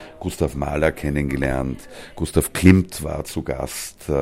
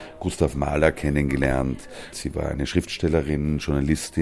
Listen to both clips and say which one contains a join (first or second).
second